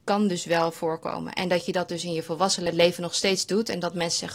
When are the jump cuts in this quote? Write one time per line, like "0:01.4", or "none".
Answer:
none